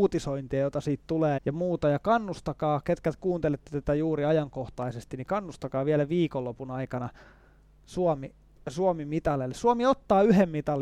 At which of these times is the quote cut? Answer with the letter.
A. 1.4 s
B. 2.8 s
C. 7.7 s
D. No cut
A